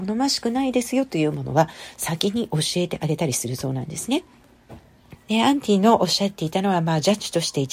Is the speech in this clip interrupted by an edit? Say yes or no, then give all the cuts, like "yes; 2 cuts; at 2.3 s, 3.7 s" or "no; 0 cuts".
yes; 1 cut; at 5.2 s